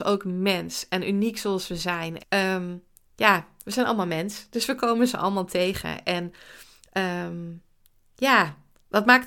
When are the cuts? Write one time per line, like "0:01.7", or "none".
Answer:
0:02.2

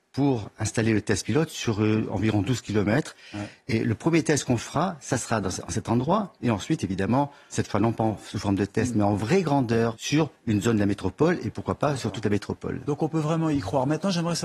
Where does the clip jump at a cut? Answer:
0:07.5
0:09.9

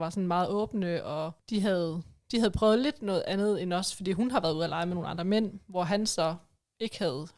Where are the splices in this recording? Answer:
none

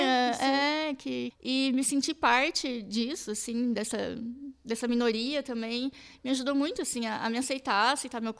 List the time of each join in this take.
0:01.3

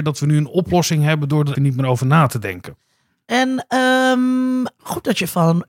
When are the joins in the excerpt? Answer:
0:01.6

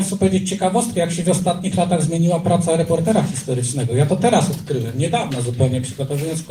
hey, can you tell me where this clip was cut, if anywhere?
none

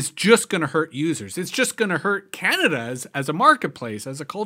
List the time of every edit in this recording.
0:03.1

